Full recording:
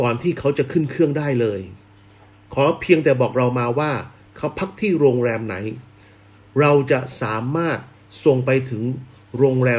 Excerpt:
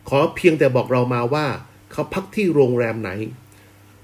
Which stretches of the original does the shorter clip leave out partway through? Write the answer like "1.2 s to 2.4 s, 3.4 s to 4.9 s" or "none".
none